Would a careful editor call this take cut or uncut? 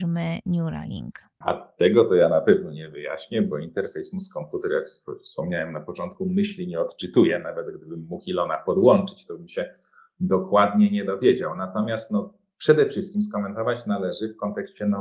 uncut